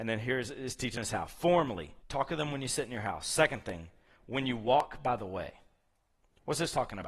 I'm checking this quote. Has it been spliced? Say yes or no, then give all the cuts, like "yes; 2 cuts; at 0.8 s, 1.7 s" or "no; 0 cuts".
yes; 1 cut; at 2.0 s